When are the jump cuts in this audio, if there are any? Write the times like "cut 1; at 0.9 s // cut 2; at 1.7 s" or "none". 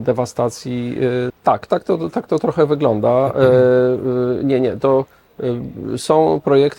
cut 1; at 1.3 s